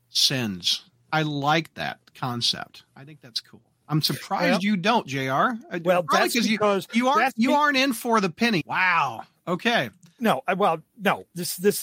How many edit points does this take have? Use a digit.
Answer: 2